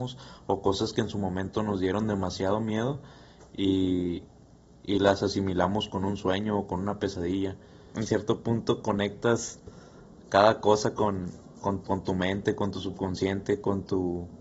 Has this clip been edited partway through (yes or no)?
yes